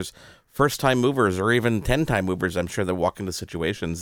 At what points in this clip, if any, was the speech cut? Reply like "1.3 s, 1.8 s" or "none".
none